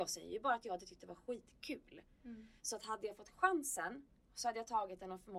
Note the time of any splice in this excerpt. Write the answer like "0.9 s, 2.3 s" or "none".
none

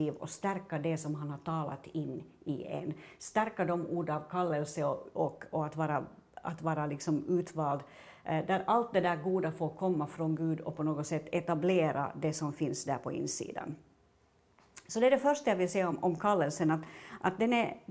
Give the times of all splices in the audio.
none

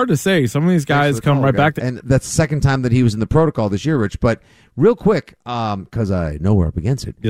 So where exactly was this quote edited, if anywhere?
1.8 s

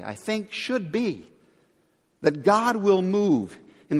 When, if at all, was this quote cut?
none

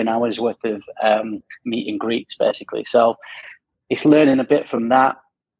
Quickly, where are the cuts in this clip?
none

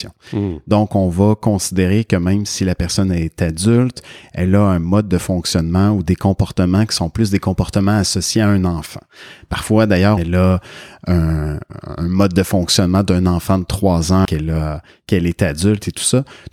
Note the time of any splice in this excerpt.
10.2 s, 14.3 s

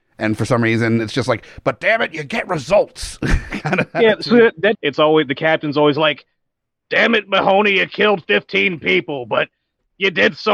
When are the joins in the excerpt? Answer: 4.7 s

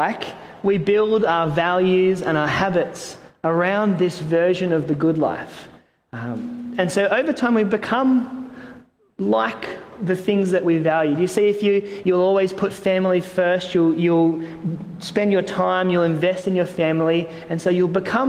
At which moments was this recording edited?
12.0 s

